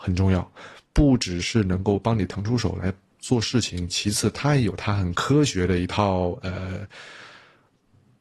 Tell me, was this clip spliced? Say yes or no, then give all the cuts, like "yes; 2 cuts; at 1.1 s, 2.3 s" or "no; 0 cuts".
no; 0 cuts